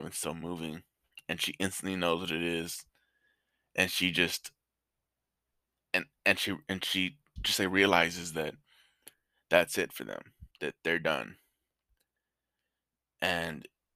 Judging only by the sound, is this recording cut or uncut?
cut